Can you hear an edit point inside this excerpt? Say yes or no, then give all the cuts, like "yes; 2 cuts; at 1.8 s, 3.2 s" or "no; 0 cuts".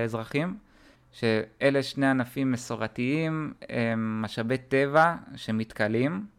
yes; 1 cut; at 0.9 s